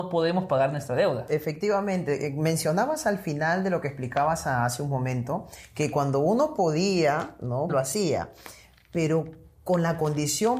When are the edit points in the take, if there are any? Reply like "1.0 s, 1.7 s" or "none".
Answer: 7.7 s